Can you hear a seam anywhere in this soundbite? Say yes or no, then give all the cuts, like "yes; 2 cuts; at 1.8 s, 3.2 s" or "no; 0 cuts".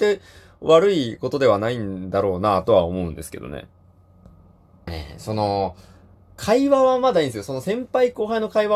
no; 0 cuts